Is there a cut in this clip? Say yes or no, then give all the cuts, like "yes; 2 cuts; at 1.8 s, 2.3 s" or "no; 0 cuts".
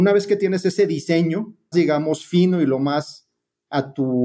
yes; 1 cut; at 1.7 s